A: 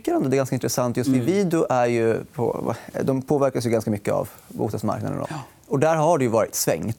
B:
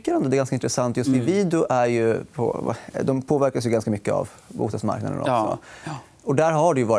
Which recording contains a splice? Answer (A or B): A